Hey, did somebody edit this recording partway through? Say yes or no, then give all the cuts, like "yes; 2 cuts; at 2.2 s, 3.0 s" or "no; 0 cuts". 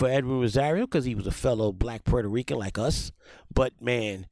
no; 0 cuts